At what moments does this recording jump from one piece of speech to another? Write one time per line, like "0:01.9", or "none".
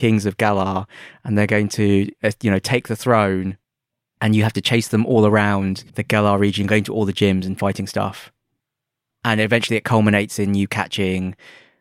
0:05.9